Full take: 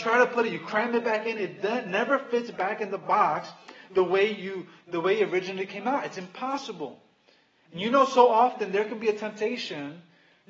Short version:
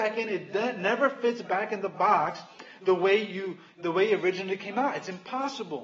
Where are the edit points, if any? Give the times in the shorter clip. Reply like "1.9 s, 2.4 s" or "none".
none